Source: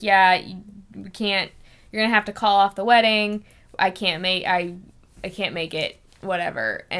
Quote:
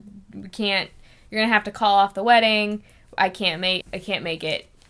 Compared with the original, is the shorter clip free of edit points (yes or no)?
no